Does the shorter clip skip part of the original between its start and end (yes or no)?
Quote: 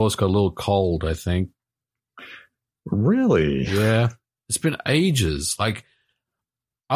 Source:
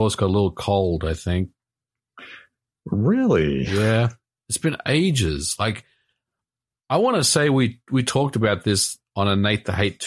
no